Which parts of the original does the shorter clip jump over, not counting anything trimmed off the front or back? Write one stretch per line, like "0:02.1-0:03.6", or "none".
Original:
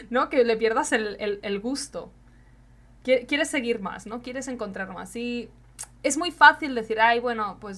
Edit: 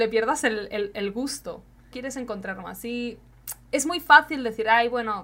0:02.4-0:04.2